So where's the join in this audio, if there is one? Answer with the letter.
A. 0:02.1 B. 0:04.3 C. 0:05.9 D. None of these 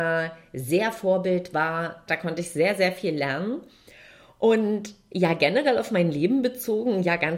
A